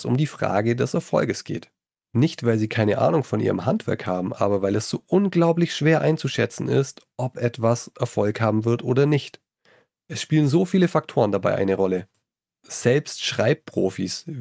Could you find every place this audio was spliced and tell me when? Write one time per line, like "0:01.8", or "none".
0:12.5